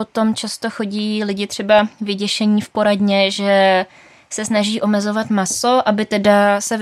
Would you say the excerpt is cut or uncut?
uncut